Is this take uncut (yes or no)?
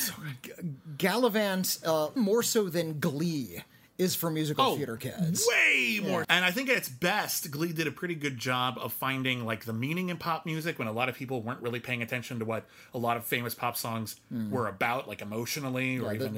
no